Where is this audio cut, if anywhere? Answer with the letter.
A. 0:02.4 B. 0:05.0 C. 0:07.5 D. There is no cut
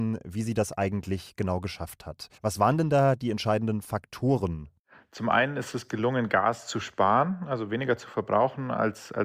A